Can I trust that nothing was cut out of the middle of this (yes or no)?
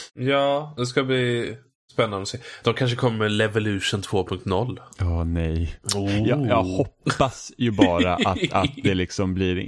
yes